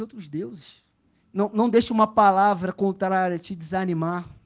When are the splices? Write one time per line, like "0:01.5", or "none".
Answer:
0:01.2

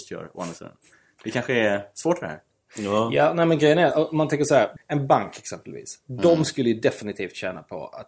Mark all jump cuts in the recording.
none

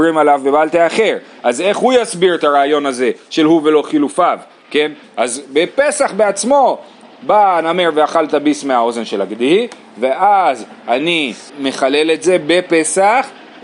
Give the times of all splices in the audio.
0:05.0
0:11.5

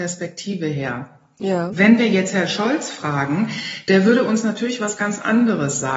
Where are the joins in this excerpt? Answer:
none

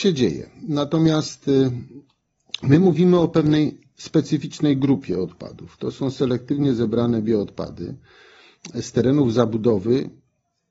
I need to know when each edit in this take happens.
none

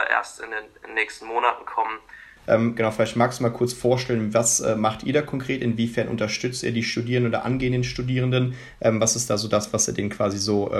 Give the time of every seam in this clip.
0:02.4

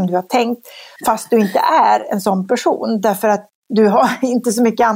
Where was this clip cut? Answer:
0:01.0

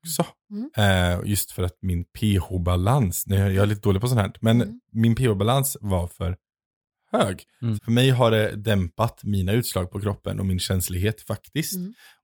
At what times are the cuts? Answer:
0:07.8

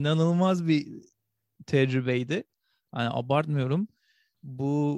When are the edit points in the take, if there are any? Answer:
none

